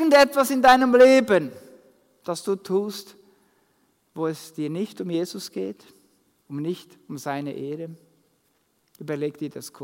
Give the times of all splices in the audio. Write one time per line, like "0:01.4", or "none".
none